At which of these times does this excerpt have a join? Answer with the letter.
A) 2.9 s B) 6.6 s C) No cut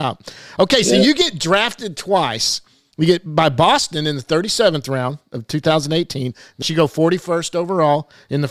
B